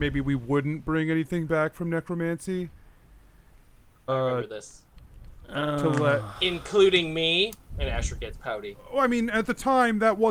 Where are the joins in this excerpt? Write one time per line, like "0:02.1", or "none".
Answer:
0:04.1